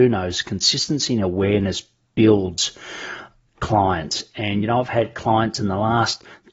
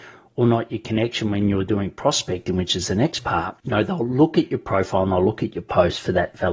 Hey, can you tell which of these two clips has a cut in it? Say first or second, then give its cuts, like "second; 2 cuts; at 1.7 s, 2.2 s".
second; 1 cut; at 3.6 s